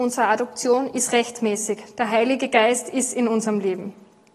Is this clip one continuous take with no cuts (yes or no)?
yes